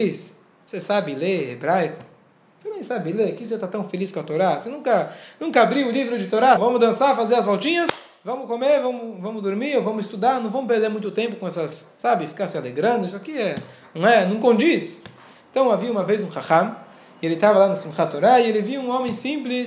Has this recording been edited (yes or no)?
yes